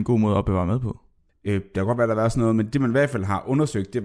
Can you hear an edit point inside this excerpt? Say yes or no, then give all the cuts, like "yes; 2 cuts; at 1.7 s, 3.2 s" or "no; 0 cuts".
yes; 1 cut; at 1.3 s